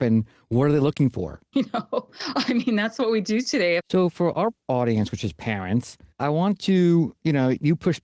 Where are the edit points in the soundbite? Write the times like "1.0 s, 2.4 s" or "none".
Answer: 1.5 s, 3.8 s